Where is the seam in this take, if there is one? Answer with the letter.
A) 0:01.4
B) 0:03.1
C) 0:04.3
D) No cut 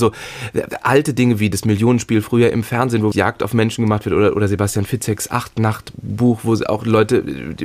B